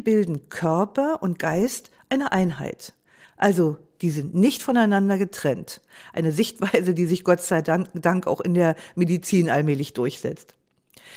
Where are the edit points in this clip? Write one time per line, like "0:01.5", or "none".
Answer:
none